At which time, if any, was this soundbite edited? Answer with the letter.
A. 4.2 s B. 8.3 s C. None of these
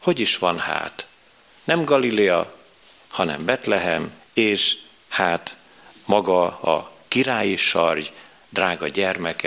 A